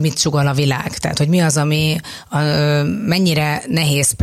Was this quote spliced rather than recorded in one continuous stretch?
no; 0 cuts

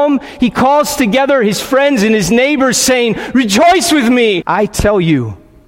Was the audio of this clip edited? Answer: yes; 1 cut; at 4.4 s

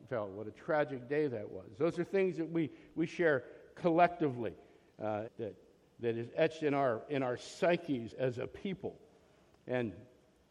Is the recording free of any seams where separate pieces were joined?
no; 2 cuts; at 5.3 s, 8.1 s

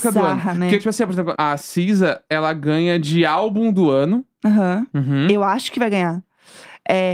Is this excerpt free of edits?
no; 2 cuts; at 1.4 s, 4.9 s

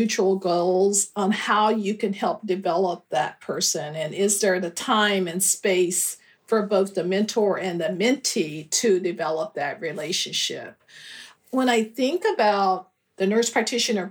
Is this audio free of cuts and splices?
yes; 0 cuts

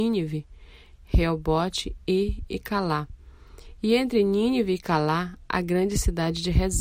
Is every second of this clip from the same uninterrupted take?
yes; 0 cuts

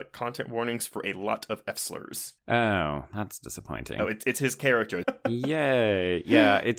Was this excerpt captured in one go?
no; 2 cuts; at 2.4 s, 5.0 s

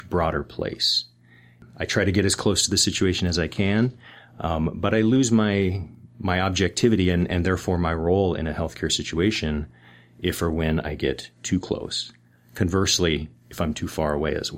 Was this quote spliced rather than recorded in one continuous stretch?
no; 0 cuts

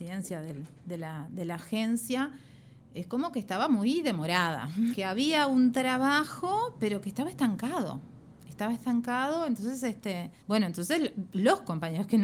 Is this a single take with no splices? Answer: no; 2 cuts; at 4.9 s, 10.4 s

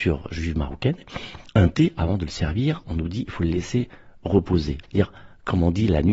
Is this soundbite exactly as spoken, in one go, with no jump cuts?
no; 1 cut; at 4.8 s

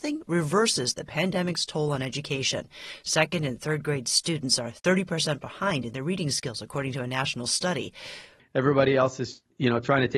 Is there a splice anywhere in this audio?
yes; 1 cut; at 8.4 s

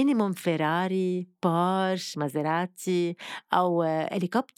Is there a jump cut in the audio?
no; 0 cuts

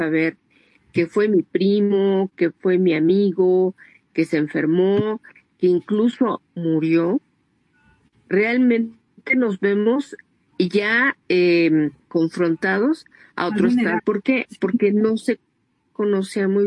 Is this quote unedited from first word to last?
no; 1 cut; at 14.0 s

